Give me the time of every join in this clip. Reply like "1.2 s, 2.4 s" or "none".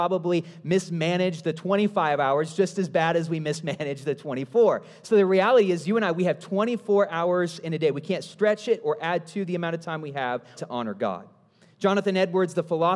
10.5 s